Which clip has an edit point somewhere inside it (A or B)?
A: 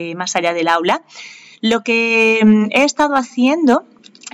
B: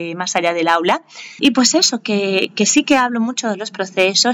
B